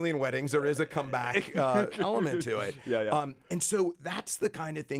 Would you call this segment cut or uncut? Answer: uncut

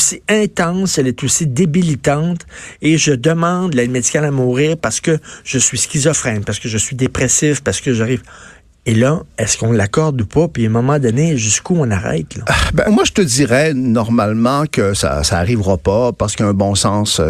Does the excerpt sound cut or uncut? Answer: cut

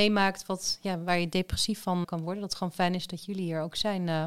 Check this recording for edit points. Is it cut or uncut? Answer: cut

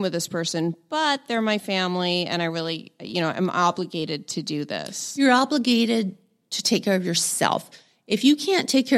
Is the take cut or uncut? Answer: uncut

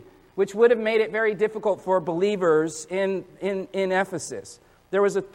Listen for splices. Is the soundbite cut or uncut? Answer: uncut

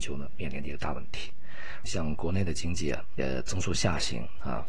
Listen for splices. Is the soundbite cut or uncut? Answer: cut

